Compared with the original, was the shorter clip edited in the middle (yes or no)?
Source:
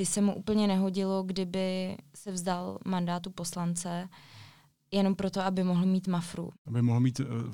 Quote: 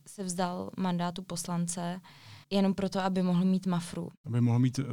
yes